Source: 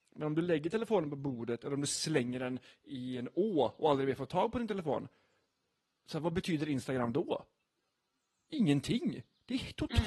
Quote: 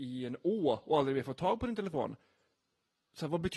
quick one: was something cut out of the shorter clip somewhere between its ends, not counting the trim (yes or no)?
no